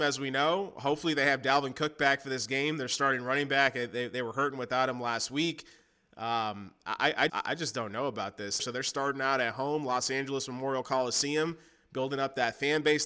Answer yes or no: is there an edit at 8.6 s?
yes